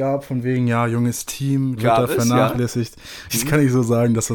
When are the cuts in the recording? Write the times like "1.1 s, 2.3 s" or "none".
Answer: 1.8 s, 3.3 s

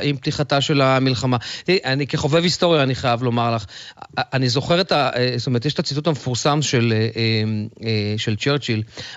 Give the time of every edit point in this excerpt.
1.8 s

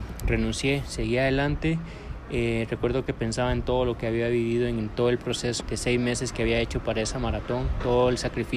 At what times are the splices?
5.6 s

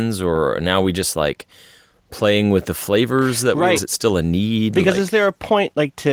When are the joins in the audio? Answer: 3.8 s

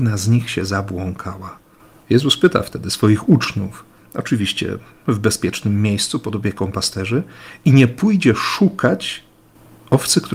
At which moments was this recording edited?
4.0 s

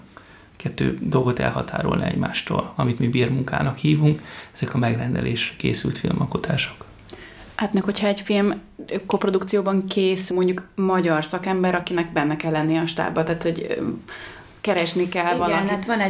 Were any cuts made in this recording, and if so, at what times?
10.3 s

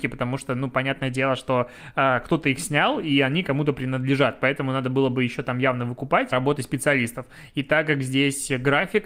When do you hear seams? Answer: 6.3 s

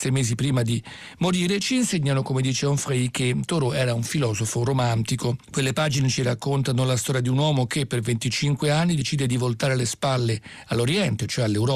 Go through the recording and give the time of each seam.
5.4 s

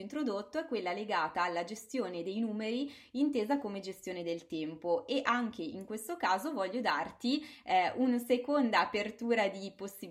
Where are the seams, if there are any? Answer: none

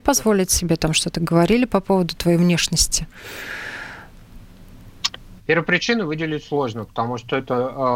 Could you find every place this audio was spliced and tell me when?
5.4 s

